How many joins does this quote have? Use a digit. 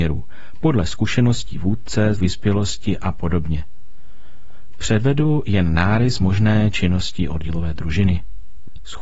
1